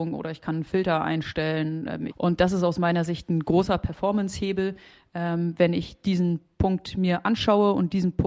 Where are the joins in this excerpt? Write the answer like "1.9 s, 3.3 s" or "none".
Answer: 2.1 s